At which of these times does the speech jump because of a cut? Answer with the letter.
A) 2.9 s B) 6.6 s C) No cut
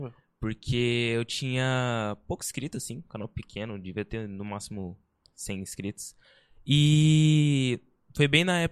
C